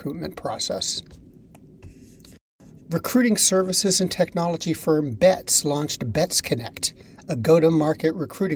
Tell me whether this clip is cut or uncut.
uncut